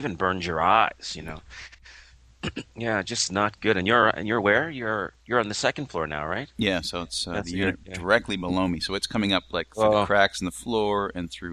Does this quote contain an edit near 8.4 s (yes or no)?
no